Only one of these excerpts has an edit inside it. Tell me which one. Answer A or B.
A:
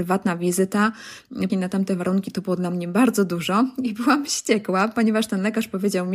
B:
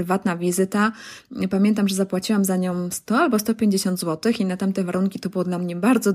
A